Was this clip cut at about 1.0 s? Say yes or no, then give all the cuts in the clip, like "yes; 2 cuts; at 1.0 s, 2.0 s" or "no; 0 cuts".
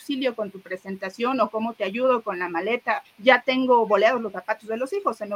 no; 1 cut; at 3.0 s